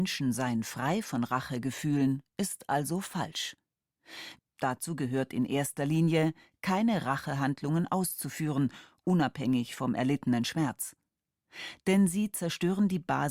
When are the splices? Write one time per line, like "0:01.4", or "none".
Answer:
0:04.4